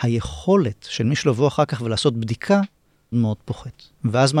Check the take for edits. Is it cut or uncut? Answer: cut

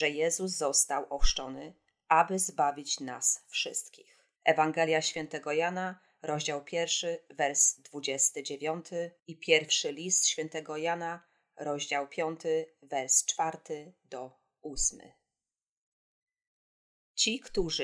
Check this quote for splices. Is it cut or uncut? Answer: cut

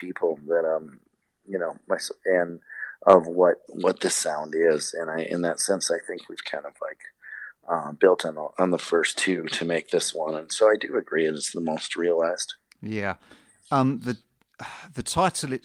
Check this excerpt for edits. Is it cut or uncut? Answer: uncut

